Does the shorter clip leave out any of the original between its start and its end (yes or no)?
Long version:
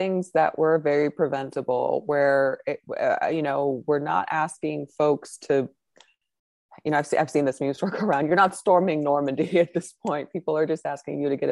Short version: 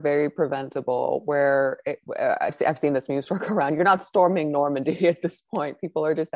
yes